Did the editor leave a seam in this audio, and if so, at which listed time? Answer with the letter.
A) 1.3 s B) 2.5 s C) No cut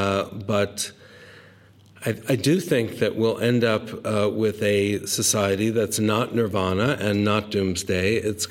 C